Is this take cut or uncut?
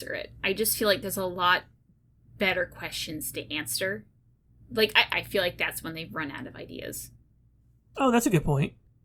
cut